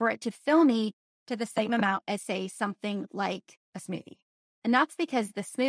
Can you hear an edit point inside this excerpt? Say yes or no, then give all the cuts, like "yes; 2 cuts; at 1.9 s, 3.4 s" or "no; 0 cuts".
yes; 1 cut; at 3.6 s